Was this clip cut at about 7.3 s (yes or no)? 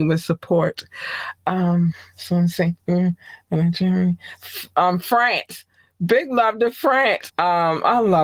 yes